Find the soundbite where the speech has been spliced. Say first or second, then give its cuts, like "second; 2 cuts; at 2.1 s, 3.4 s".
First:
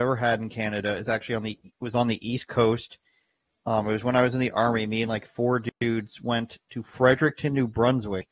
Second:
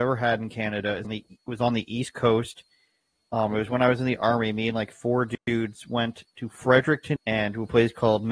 second; 2 cuts; at 1.0 s, 7.2 s